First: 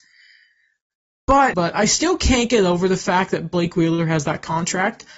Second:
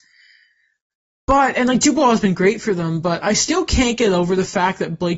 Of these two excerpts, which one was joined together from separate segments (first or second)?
first